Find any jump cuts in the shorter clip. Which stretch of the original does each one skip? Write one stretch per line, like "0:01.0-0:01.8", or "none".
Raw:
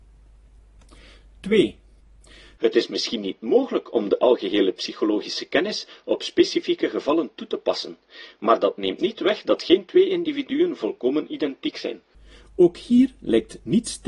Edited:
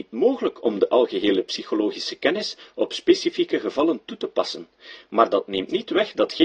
none